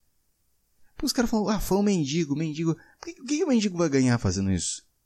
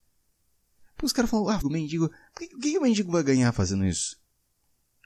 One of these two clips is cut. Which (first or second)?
second